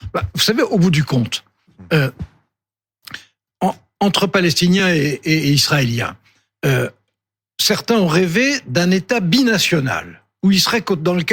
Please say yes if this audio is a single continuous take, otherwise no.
yes